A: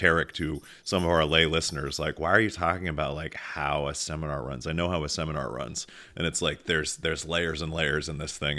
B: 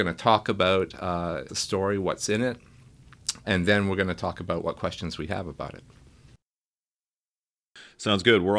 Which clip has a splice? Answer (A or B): B